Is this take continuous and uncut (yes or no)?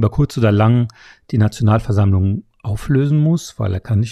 yes